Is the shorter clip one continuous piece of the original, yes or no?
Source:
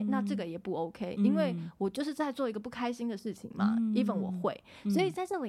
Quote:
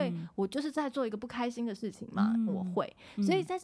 no